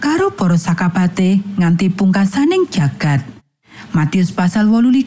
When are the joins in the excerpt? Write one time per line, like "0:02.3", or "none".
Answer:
none